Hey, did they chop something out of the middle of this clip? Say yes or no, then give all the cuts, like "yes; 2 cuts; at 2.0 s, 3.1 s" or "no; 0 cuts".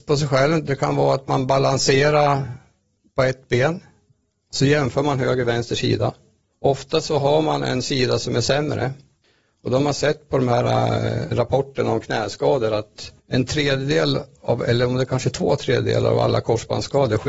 yes; 2 cuts; at 11.3 s, 13.2 s